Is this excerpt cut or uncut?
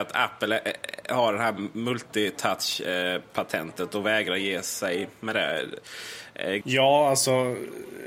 cut